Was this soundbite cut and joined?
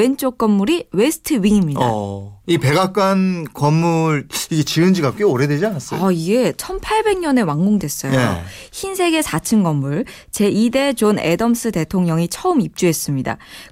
no; 0 cuts

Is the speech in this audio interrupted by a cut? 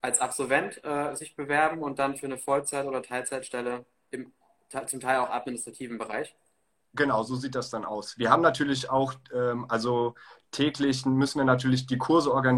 no; 0 cuts

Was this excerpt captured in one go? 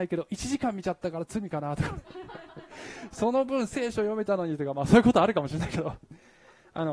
yes; 0 cuts

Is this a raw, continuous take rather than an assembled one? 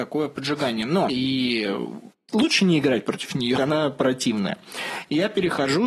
no; 2 cuts; at 1.1 s, 3.6 s

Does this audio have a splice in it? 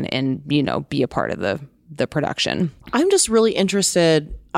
yes; 1 cut; at 2.8 s

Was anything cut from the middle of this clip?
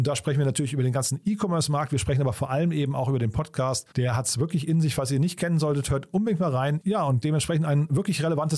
yes; 2 cuts; at 3.9 s, 6.8 s

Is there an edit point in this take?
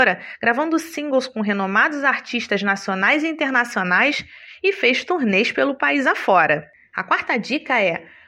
no; 0 cuts

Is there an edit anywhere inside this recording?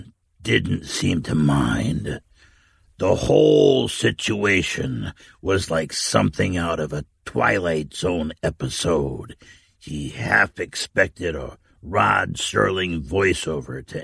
no; 0 cuts

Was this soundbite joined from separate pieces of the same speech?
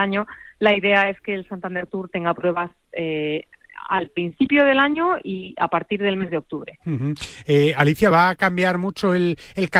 no; 0 cuts

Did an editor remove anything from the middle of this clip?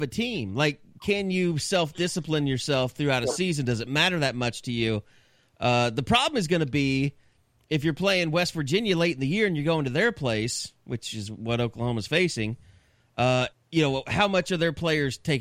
yes; 1 cut; at 13.5 s

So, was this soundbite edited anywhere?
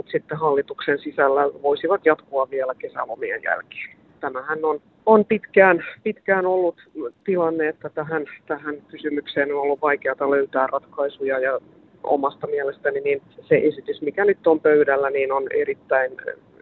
yes; 2 cuts; at 4.2 s, 13.3 s

